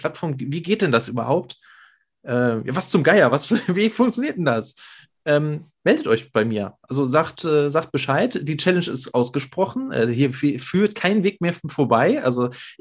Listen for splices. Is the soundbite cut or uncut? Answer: uncut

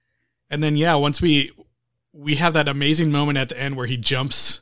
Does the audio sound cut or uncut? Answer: uncut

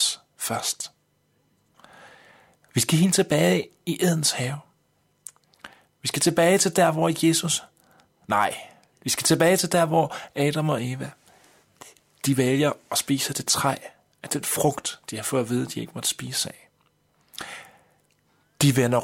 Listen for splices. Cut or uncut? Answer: uncut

